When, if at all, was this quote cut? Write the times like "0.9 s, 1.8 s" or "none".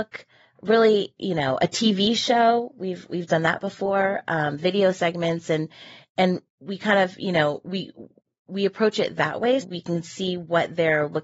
6.5 s, 9.6 s